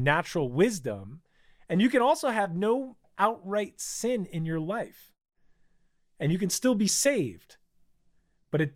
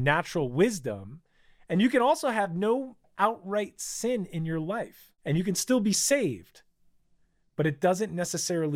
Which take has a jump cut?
second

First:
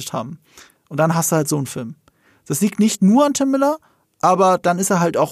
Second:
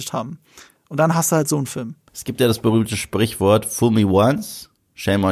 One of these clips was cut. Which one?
second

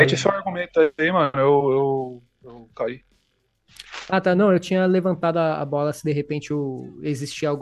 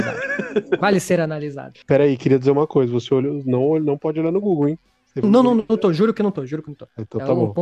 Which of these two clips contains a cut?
second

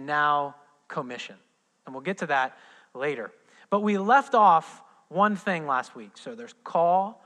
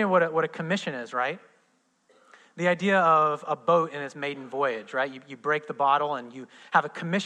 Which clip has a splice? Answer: first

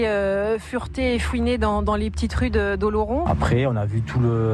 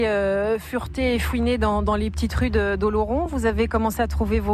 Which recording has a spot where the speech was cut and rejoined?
first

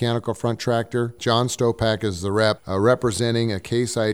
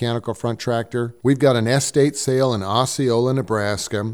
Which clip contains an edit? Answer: first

